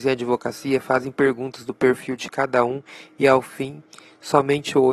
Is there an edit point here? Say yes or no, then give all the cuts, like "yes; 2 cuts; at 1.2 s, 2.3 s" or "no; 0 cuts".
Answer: no; 0 cuts